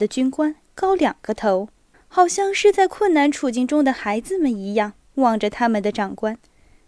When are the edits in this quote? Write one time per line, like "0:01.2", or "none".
0:01.9